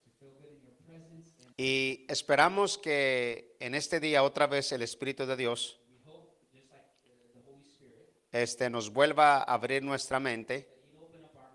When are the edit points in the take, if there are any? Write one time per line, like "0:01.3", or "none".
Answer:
0:01.5